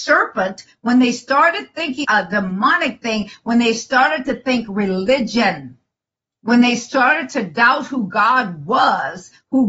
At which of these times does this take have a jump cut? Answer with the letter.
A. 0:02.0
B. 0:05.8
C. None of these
A